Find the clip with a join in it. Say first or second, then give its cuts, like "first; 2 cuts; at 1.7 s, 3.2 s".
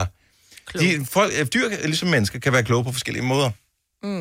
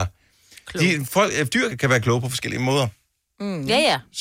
second; 1 cut; at 1.7 s